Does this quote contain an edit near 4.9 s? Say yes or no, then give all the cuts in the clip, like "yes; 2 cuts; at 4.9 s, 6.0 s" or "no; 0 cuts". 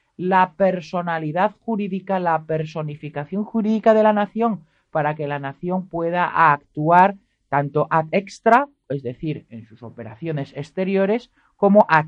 no; 0 cuts